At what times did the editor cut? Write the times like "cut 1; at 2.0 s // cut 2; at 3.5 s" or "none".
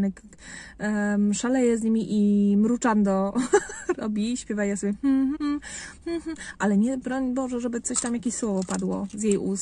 cut 1; at 5.3 s